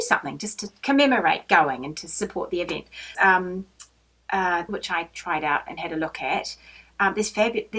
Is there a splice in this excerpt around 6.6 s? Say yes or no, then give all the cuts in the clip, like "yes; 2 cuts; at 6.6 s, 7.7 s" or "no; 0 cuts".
no; 2 cuts; at 3.1 s, 4.7 s